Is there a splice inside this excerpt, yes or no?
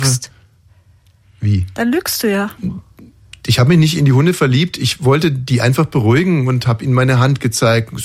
yes